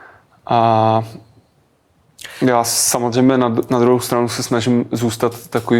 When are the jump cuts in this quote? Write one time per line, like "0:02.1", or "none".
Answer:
none